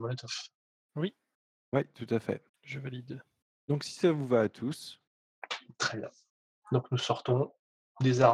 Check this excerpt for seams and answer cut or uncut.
uncut